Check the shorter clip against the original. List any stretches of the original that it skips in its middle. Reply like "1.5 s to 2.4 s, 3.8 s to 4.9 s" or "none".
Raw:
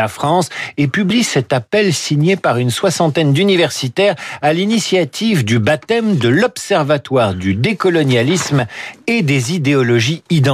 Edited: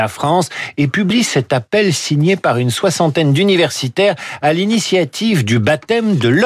none